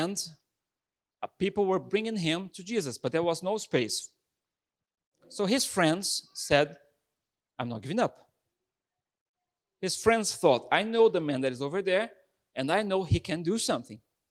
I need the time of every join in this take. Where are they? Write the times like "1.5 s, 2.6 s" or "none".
none